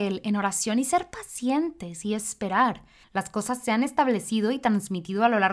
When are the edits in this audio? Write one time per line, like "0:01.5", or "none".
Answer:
0:03.0